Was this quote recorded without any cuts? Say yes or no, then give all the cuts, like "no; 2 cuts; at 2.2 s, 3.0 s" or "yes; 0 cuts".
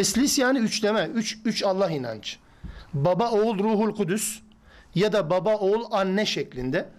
yes; 0 cuts